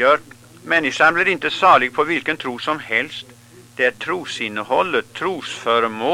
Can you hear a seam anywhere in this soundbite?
no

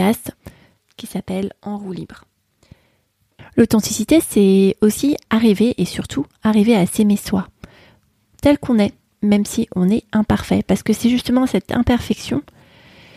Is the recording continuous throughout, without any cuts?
yes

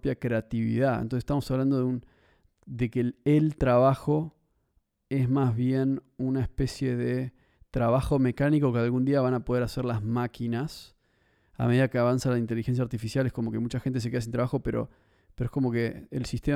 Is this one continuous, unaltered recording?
yes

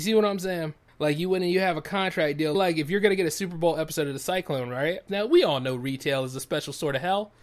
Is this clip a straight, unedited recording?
no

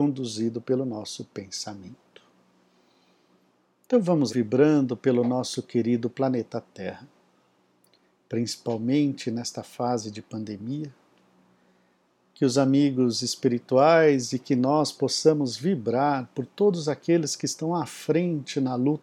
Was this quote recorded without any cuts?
no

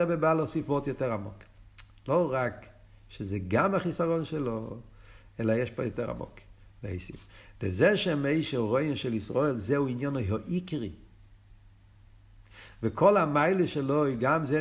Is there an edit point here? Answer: no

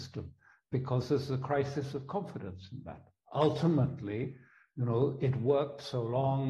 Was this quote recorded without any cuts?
yes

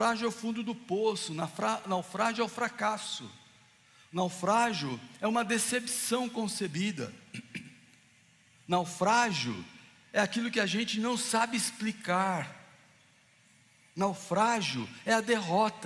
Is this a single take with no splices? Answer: yes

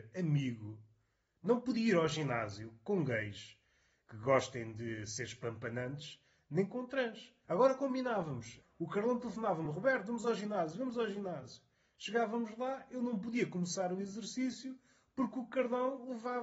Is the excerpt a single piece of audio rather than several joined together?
yes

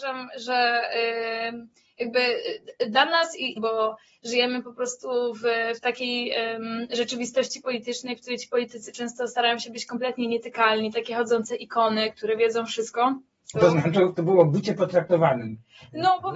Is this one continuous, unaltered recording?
no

